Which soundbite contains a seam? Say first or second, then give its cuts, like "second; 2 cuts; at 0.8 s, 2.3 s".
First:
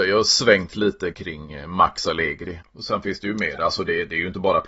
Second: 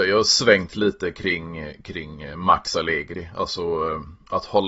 first; 2 cuts; at 1.1 s, 2.6 s